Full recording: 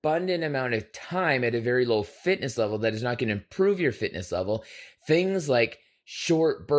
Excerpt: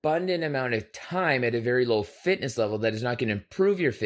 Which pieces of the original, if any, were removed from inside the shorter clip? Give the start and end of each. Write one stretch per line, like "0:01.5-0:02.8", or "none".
none

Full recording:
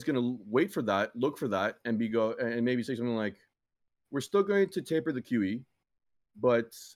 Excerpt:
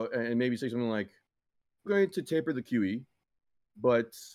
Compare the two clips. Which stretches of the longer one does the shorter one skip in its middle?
0:04.1-0:04.5

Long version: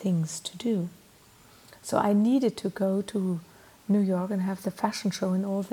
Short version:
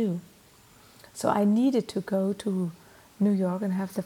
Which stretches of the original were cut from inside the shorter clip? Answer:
none

